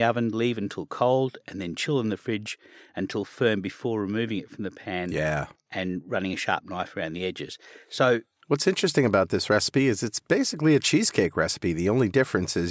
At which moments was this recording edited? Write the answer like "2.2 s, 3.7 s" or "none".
none